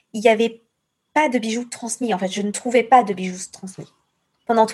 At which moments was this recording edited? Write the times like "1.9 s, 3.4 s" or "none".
none